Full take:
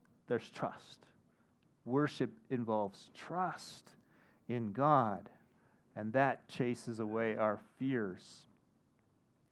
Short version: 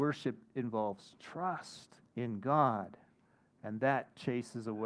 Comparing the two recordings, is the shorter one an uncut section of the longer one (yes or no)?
no